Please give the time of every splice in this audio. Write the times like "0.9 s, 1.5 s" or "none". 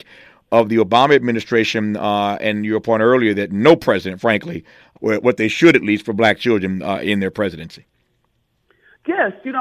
5.0 s